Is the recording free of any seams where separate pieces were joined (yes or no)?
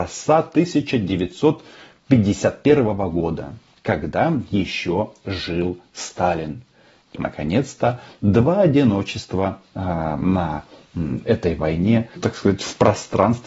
no